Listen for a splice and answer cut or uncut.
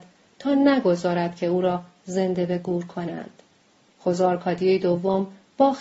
uncut